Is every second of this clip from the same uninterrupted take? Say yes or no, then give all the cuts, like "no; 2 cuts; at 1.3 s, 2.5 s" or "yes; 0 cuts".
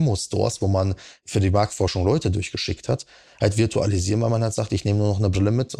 yes; 0 cuts